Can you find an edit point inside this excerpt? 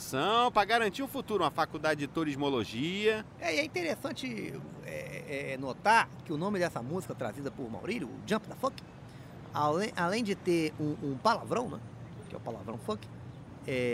no; 0 cuts

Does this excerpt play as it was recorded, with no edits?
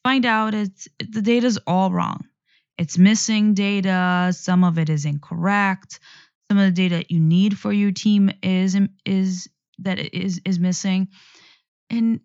yes; 0 cuts

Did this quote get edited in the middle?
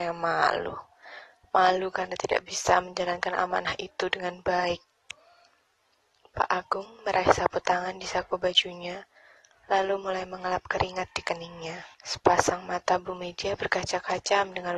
yes; 1 cut; at 11.9 s

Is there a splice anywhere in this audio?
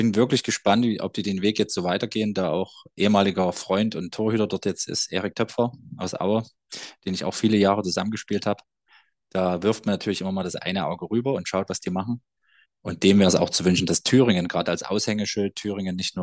yes; 1 cut; at 12.6 s

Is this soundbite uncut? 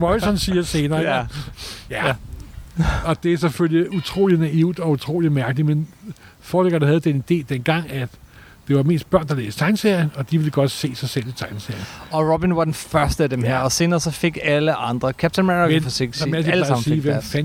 yes; 0 cuts

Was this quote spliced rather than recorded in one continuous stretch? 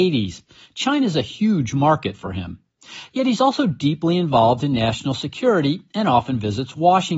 no; 0 cuts

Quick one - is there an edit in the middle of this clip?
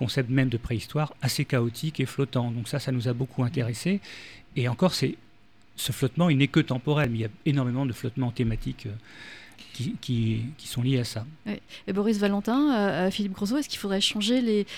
no; 0 cuts

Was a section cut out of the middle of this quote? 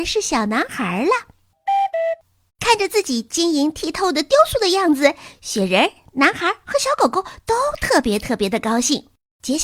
yes; 1 cut; at 2.5 s

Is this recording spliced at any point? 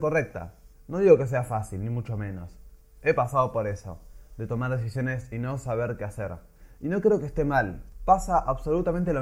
yes; 1 cut; at 6.8 s

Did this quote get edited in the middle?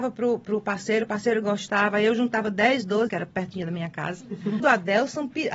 yes; 2 cuts; at 3.1 s, 4.6 s

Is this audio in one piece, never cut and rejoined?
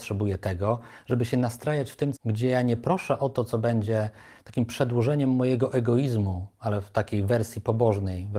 no; 1 cut; at 2.2 s

